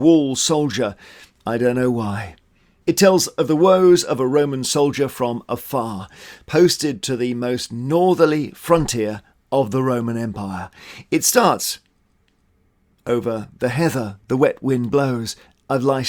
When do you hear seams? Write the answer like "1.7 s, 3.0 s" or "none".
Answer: 2.8 s